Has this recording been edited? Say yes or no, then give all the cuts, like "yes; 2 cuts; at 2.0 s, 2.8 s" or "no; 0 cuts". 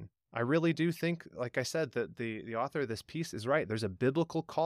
no; 0 cuts